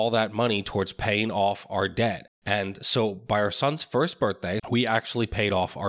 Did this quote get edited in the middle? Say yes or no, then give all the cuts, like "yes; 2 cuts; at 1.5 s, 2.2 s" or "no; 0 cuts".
yes; 2 cuts; at 2.4 s, 4.6 s